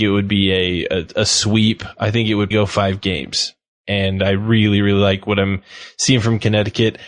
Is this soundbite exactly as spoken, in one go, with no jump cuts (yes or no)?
no